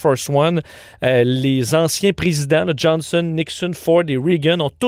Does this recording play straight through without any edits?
yes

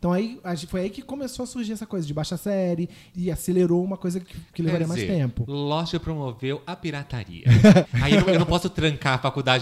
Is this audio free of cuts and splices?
no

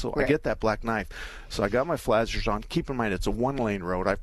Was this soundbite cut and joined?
no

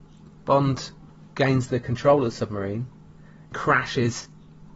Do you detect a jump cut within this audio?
yes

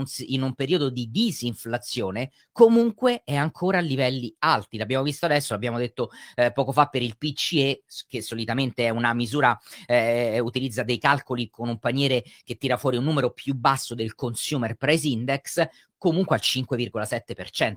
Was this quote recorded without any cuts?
yes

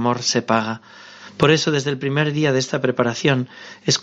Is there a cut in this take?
no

